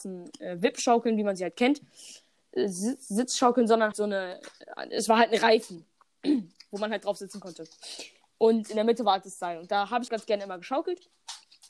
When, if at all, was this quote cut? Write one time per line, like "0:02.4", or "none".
0:03.9
0:10.1